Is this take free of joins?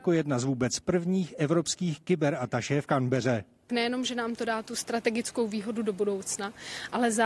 yes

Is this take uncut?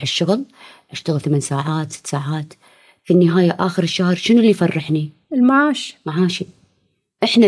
yes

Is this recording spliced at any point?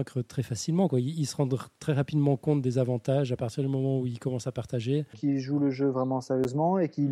yes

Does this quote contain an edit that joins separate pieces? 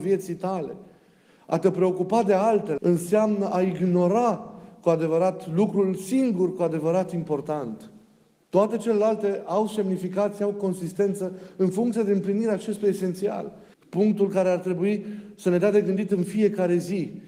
yes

